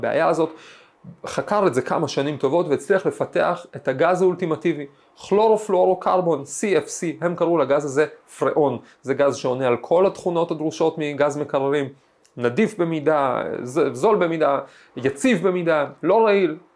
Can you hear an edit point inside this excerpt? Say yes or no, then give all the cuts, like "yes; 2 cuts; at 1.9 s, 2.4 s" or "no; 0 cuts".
no; 0 cuts